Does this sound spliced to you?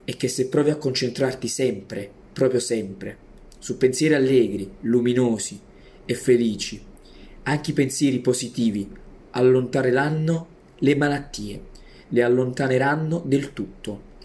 no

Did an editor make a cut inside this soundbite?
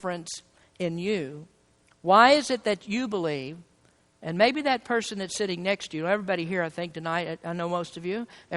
no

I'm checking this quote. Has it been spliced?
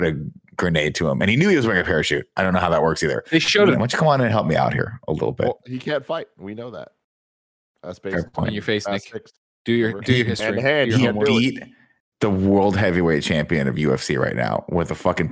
yes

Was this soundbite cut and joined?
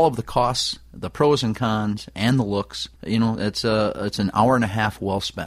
yes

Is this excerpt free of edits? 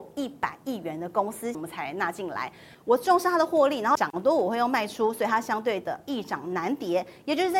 no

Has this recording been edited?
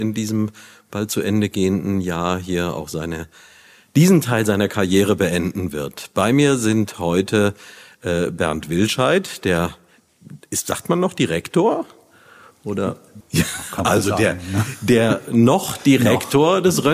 yes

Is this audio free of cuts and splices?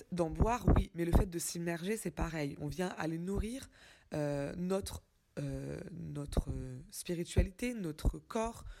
yes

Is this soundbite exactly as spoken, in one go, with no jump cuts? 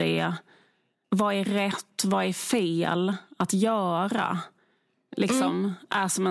yes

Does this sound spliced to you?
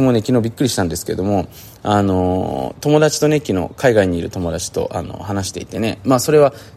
no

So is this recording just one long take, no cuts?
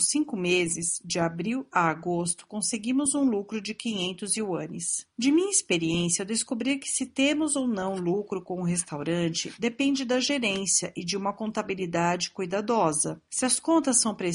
yes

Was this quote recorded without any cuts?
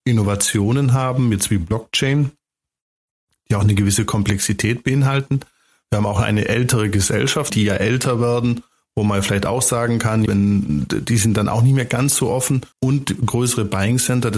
no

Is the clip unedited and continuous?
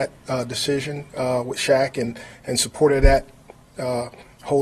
yes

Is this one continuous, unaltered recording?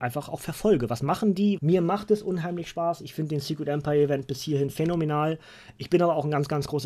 no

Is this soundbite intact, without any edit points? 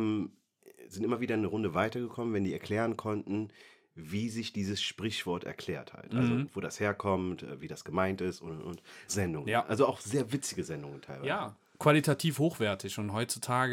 no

